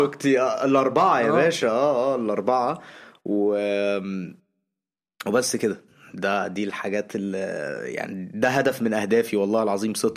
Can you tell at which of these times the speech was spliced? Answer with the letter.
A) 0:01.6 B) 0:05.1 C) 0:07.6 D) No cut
D